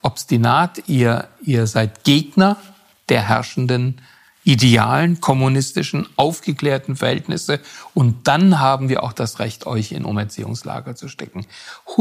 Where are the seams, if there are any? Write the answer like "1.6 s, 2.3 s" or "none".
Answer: none